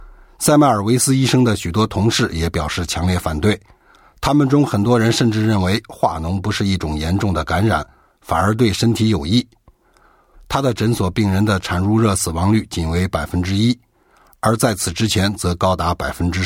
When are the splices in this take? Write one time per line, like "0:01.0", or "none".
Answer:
0:10.3